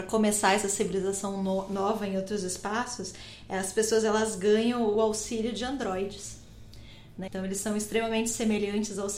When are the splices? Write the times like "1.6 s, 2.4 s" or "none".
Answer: 7.3 s